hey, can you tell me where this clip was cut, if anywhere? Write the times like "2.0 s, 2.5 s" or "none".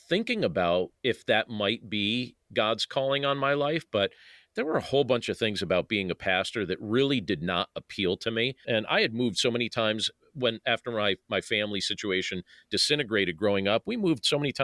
1.0 s, 8.6 s

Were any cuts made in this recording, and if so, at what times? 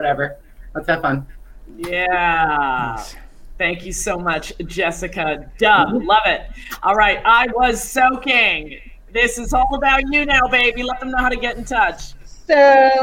none

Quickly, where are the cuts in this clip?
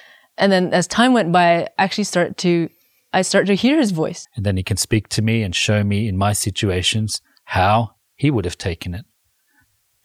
4.2 s

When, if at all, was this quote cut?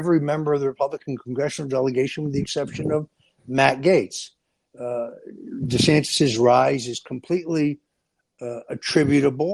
none

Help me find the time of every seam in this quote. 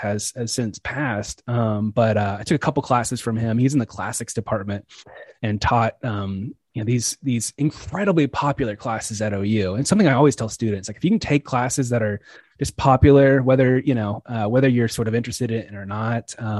none

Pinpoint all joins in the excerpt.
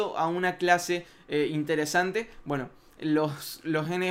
none

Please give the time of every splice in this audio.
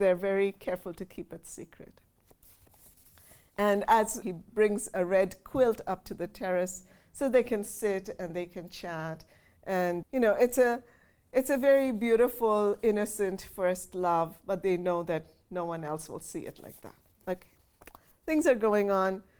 4.2 s, 10.0 s

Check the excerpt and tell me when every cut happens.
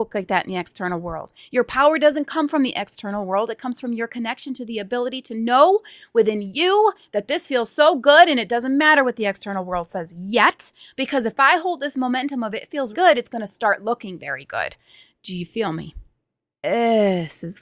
12.9 s, 16.5 s

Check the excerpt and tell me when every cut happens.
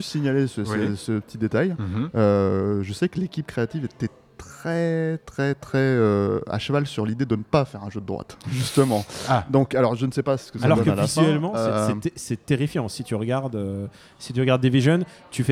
none

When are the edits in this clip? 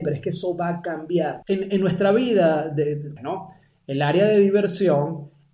1.4 s, 3.2 s

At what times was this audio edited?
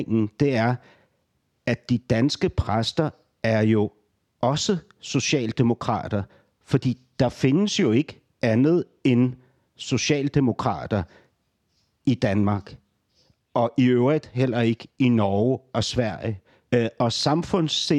16.7 s

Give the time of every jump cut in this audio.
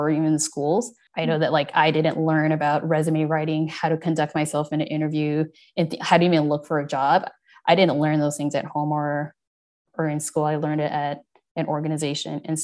none

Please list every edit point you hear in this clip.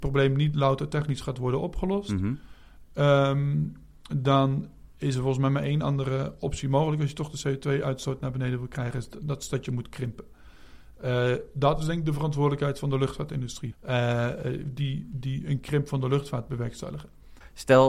13.7 s

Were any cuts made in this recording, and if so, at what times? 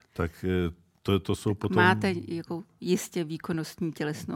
none

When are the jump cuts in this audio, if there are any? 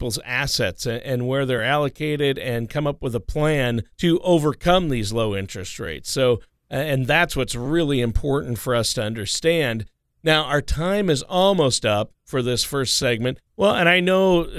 3.9 s, 13.5 s

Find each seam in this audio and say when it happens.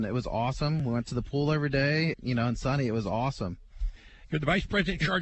2.1 s

